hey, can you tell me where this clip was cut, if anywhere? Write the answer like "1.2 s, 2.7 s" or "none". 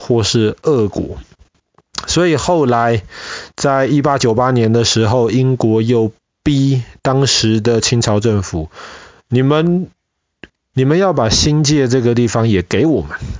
10.7 s